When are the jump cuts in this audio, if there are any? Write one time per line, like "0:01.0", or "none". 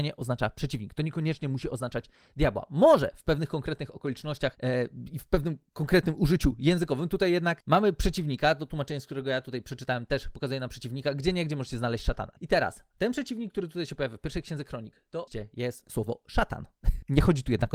0:12.4